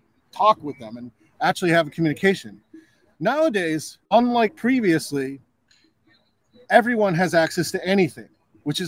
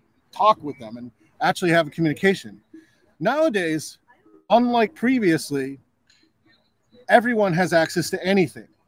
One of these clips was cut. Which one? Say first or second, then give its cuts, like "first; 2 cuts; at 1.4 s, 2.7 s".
first; 1 cut; at 4.0 s